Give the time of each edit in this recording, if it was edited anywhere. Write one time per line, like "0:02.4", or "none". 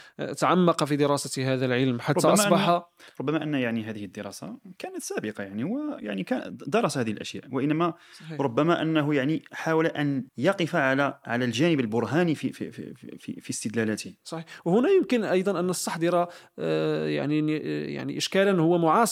0:10.3